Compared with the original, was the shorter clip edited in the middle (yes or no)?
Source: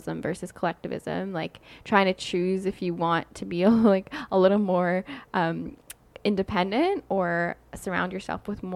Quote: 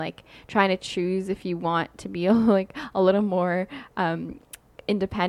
no